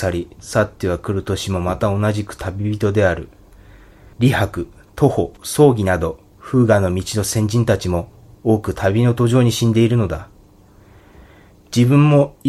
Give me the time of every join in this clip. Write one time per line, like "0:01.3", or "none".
0:04.1
0:05.4